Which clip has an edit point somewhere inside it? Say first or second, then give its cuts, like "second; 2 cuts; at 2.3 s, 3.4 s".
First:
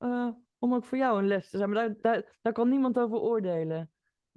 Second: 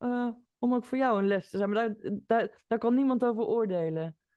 first; 1 cut; at 2.0 s